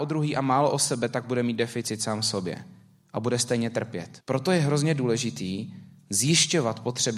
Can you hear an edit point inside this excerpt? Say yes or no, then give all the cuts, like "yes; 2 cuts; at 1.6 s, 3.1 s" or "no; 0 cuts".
yes; 1 cut; at 4.2 s